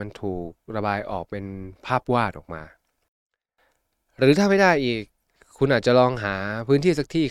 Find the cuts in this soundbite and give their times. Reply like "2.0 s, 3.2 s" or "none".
none